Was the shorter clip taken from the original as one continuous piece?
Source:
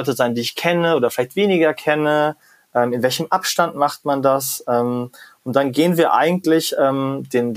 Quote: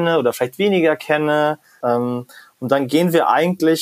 no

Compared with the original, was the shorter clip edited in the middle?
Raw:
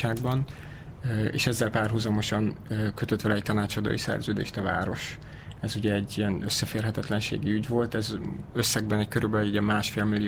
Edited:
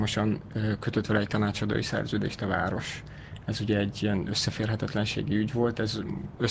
no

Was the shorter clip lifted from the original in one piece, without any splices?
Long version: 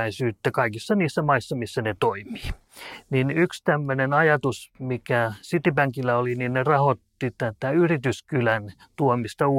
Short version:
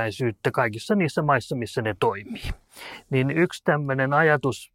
yes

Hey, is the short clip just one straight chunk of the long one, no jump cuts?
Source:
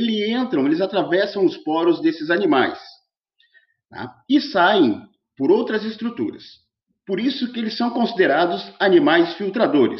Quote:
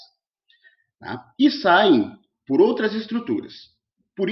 yes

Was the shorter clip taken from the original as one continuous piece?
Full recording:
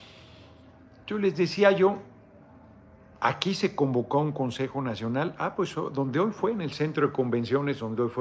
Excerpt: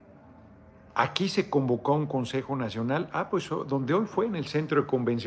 yes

